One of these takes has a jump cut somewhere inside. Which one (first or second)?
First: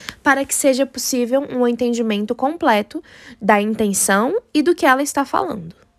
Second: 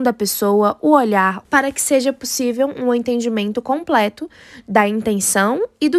second